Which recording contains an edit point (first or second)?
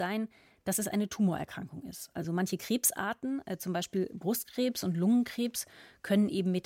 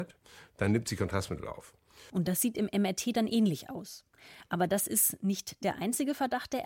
second